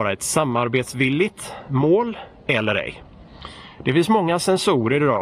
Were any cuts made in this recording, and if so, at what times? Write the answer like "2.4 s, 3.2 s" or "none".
none